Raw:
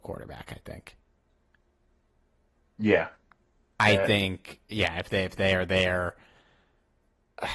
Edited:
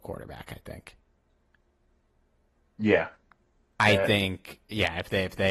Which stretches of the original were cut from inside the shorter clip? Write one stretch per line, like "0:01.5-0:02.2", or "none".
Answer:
none